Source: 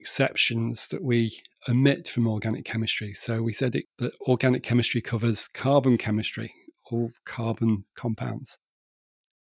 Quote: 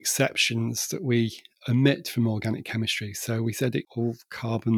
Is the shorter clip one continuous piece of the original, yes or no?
no